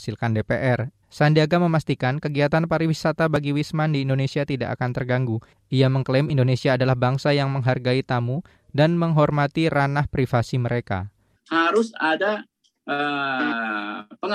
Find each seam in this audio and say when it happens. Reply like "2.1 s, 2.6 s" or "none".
1.0 s, 11.4 s